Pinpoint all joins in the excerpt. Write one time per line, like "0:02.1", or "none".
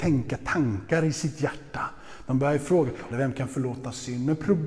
0:03.1